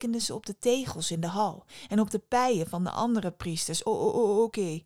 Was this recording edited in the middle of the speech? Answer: no; 0 cuts

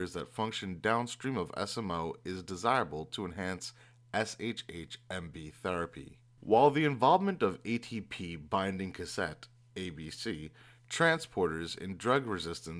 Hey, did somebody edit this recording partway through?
yes; 1 cut; at 6.4 s

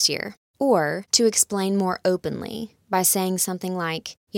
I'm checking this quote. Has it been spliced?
no; 0 cuts

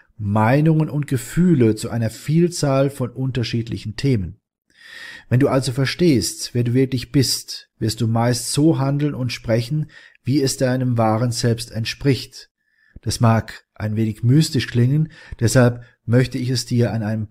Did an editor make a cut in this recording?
no; 0 cuts

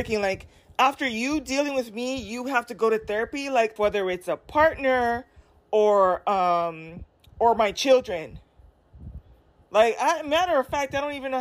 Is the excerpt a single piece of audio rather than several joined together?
no; 1 cut; at 3.8 s

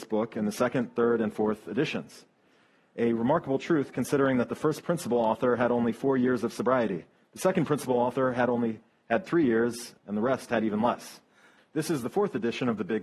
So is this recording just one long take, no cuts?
no; 2 cuts; at 10.0 s, 11.6 s

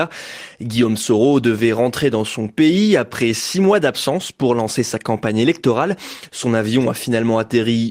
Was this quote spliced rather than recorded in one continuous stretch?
no; 0 cuts

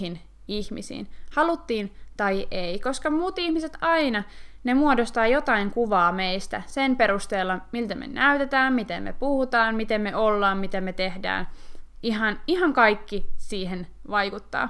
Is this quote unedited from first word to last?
yes; 0 cuts

